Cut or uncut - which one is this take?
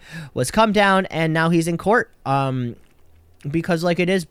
uncut